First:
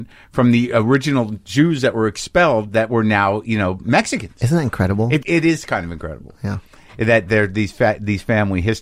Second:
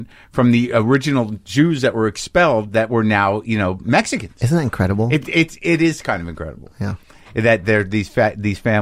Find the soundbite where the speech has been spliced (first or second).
first